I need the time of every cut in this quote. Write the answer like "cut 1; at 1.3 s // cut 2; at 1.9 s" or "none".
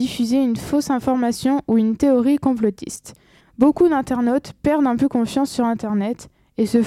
cut 1; at 3.4 s